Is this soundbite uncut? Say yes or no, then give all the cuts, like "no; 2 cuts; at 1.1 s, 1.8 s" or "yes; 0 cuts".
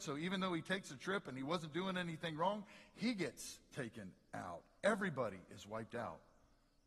yes; 0 cuts